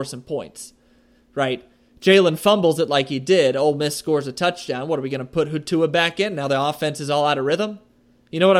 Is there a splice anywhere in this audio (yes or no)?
no